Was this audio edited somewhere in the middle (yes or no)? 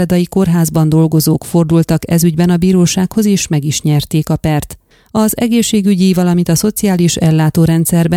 no